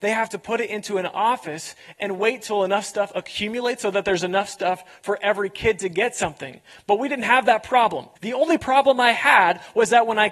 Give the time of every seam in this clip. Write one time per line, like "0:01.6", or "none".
0:08.2